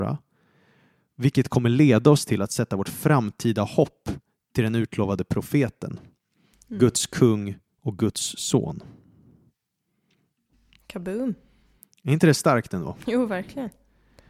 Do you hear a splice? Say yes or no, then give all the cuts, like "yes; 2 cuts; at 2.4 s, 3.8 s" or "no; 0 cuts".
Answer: no; 0 cuts